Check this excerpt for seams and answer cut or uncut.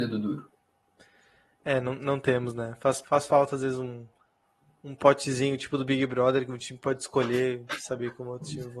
cut